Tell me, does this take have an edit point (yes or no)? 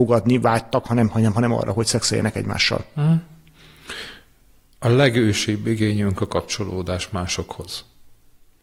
no